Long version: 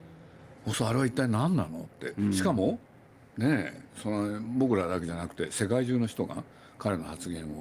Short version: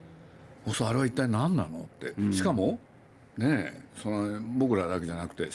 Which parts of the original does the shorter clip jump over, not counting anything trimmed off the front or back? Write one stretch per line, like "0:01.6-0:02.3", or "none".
none